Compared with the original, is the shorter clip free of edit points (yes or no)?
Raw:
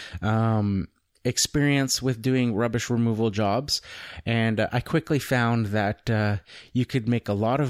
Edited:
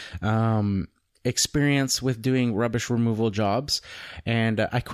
yes